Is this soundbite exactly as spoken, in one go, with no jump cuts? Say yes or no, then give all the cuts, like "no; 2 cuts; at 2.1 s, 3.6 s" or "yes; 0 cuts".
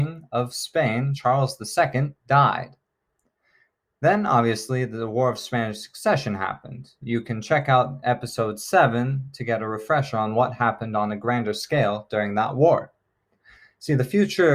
yes; 0 cuts